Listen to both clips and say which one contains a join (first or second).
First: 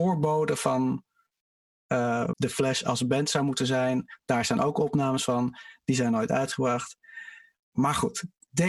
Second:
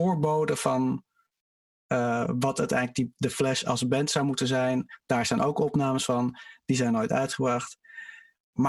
first